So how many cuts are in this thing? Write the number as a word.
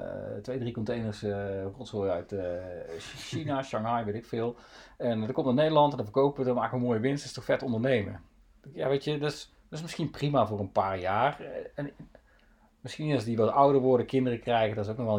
zero